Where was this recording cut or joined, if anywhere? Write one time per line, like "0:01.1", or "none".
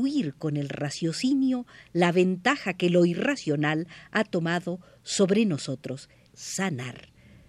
0:06.3